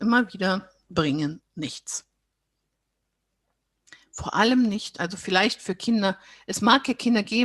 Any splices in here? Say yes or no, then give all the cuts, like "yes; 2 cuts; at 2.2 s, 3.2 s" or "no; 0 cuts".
no; 0 cuts